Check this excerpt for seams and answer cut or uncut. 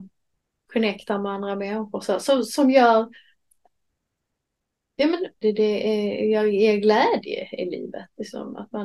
cut